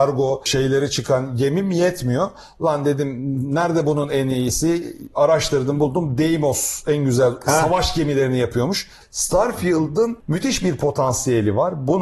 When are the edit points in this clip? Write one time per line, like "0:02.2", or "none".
0:09.0